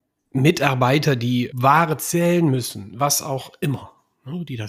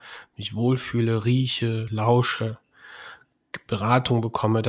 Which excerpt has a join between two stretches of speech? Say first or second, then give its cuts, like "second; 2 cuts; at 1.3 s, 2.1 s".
first; 1 cut; at 1.5 s